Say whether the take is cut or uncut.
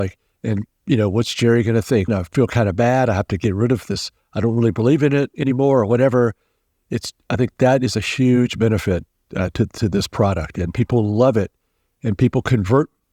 cut